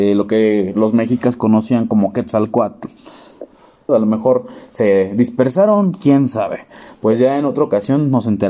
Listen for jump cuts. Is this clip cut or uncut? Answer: cut